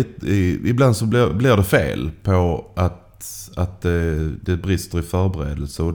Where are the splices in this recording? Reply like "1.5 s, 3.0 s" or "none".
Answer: none